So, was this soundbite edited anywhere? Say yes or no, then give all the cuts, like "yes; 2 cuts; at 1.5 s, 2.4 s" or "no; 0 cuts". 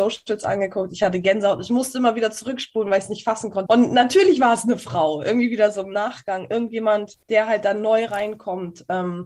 yes; 2 cuts; at 3.7 s, 7.2 s